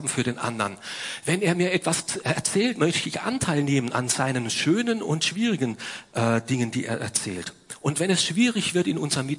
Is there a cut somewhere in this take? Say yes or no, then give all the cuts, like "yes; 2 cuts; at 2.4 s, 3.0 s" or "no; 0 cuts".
no; 0 cuts